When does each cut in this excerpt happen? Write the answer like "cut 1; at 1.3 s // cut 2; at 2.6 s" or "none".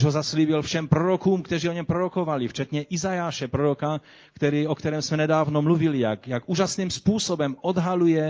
cut 1; at 6.2 s